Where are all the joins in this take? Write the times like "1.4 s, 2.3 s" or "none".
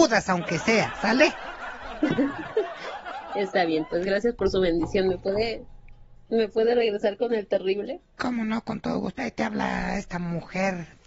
none